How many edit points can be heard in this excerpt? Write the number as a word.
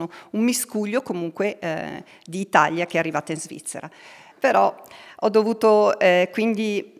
one